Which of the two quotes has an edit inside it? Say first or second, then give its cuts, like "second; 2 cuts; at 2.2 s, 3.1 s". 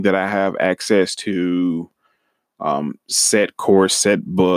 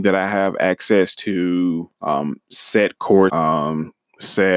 second; 2 cuts; at 1.9 s, 3.3 s